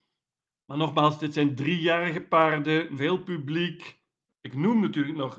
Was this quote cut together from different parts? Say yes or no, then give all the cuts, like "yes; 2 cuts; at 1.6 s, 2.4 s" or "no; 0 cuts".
yes; 2 cuts; at 3.0 s, 4.3 s